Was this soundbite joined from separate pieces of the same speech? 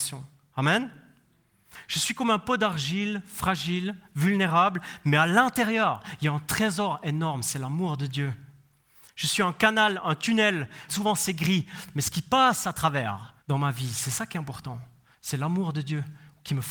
yes; 2 cuts; at 10.9 s, 13.4 s

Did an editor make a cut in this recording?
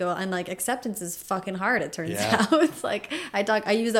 no; 0 cuts

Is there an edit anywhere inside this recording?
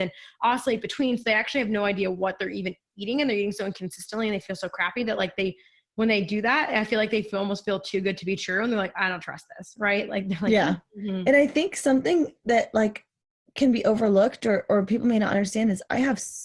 no; 0 cuts

